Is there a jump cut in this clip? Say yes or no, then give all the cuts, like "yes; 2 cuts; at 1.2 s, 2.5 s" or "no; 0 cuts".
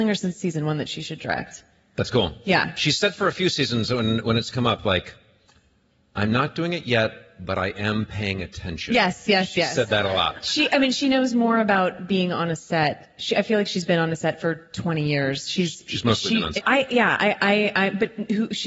yes; 1 cut; at 16.6 s